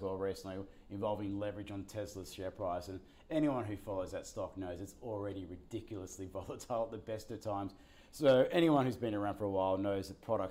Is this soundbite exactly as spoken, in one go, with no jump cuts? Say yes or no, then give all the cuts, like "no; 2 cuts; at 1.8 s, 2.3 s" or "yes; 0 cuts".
yes; 0 cuts